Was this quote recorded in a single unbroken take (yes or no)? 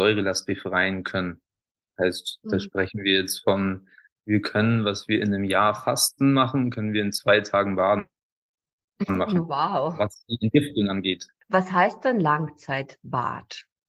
yes